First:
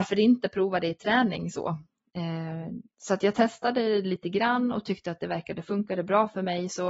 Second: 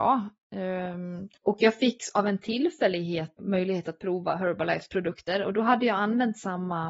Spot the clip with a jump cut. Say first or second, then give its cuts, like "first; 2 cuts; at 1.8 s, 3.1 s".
second; 2 cuts; at 1.4 s, 3.4 s